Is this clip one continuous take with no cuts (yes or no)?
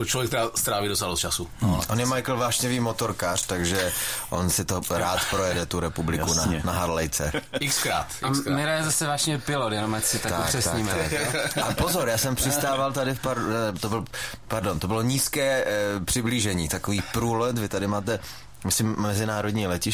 yes